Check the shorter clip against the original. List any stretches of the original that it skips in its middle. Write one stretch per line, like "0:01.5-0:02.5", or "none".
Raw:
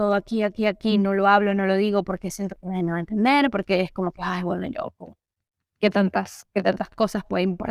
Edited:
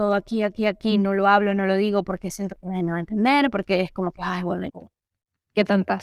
0:04.7-0:04.9

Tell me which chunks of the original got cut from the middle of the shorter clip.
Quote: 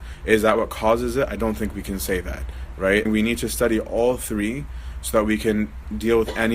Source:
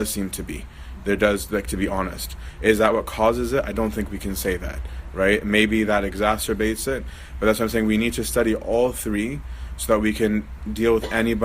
0:05.4-0:07.8

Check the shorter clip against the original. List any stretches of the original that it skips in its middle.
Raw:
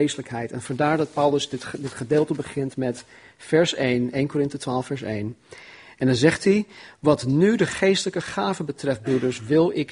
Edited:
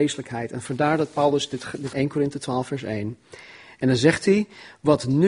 0:01.9-0:04.1

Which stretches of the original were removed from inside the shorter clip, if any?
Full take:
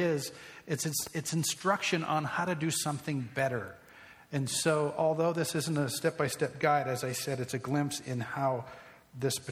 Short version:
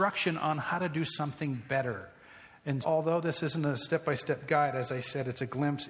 0:04.5-0:04.9

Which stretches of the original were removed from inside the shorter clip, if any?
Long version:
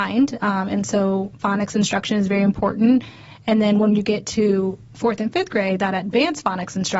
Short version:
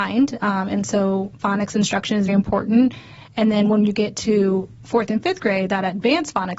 0:02.3-0:02.4

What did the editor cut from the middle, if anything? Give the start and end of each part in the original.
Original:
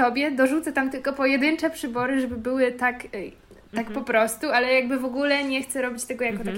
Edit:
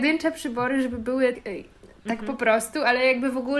0:02.7-0:03.0

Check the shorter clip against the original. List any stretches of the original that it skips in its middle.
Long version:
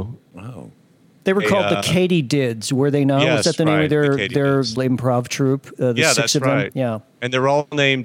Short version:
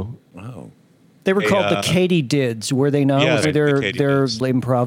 0:03.4-0:03.8

